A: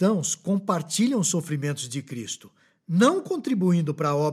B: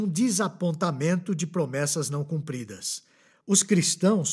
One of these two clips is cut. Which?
B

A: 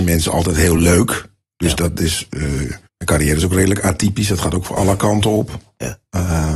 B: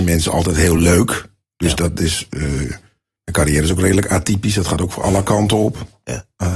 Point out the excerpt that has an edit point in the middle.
A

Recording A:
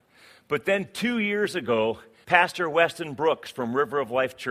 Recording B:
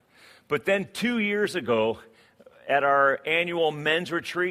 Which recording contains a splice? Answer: A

